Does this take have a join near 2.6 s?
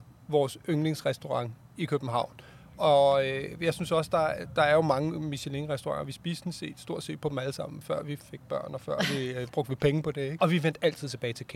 no; 2 cuts; at 7.8 s, 9.5 s

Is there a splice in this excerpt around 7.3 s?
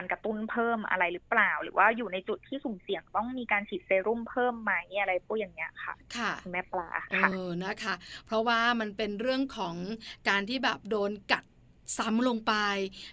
no; 0 cuts

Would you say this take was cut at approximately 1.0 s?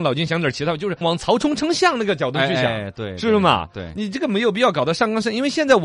yes; 1 cut; at 1.0 s

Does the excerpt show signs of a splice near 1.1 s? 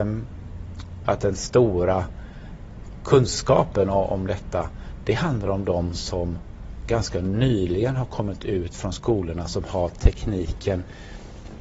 yes; 1 cut; at 1.1 s

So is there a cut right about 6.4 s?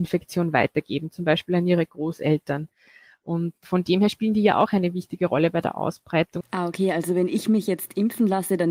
yes; 1 cut; at 6.4 s

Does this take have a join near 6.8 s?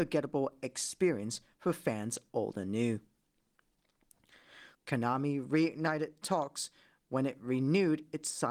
no; 1 cut; at 4.7 s

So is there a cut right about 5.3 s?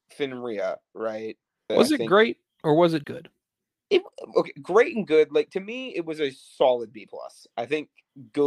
no; 2 cuts; at 1.7 s, 3.0 s

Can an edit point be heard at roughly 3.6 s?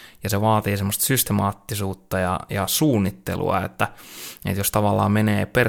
no; 0 cuts

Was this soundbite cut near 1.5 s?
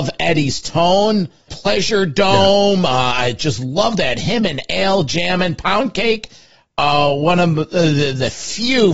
yes; 1 cut; at 1.5 s

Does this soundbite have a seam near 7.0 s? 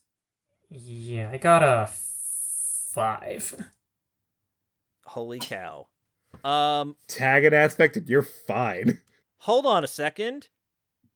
no; 2 cuts; at 4.9 s, 9.2 s

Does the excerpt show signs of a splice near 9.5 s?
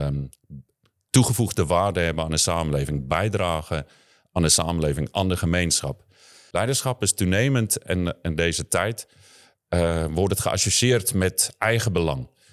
no; 1 cut; at 6.5 s

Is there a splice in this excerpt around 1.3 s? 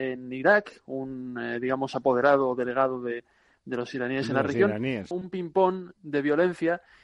no; 1 cut; at 5.1 s

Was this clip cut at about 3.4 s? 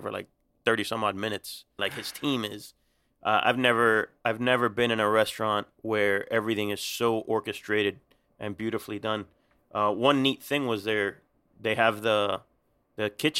no; 1 cut; at 1.8 s

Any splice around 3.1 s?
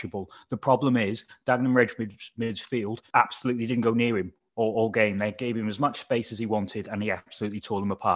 yes; 1 cut; at 3.1 s

